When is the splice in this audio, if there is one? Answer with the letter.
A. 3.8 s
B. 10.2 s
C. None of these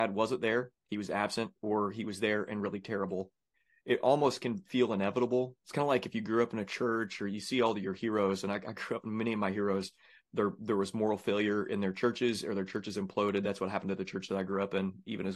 C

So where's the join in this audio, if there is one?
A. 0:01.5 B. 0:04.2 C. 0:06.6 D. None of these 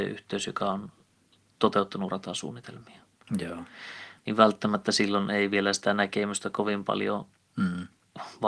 B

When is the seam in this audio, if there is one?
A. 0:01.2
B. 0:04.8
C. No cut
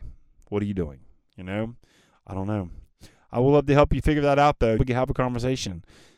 B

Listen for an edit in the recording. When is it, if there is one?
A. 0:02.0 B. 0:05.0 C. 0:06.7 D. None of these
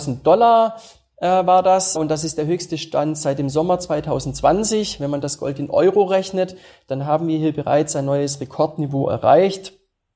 A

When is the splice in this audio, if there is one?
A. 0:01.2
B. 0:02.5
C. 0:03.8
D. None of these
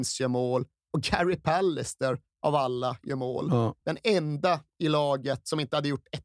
D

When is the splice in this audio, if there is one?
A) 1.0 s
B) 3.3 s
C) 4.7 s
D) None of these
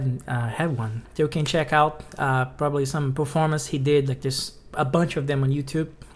A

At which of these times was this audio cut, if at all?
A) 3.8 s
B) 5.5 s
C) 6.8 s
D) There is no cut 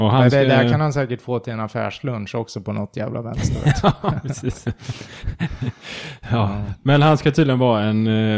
D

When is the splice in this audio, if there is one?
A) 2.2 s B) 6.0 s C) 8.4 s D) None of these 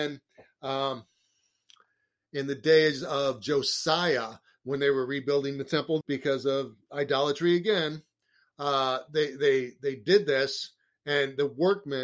B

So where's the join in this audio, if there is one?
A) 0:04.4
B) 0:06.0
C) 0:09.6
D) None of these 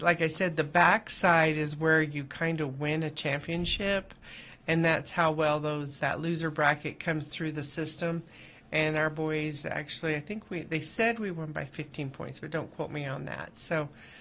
B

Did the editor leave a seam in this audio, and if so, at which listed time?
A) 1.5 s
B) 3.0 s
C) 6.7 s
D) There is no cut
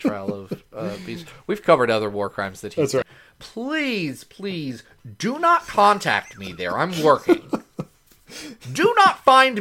B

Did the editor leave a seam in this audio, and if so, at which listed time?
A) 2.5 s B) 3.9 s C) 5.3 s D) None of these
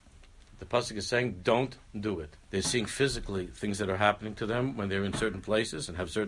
A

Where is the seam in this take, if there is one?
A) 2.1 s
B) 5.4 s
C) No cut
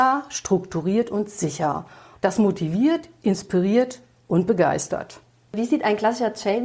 A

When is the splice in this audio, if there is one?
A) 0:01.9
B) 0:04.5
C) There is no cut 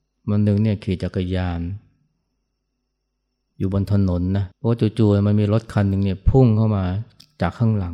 B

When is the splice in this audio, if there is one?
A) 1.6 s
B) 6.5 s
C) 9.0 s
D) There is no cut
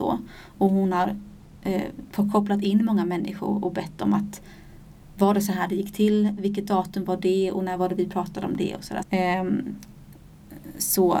C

